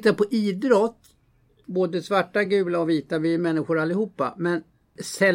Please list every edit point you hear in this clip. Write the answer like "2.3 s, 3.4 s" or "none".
none